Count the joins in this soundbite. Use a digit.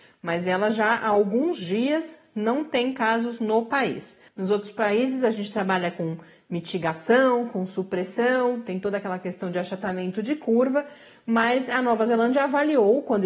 1